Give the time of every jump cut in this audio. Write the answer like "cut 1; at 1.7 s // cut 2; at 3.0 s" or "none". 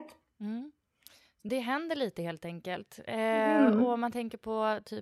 none